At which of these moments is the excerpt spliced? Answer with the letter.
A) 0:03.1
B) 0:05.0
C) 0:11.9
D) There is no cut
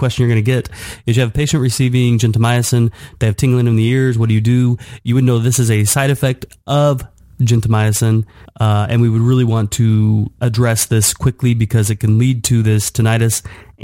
D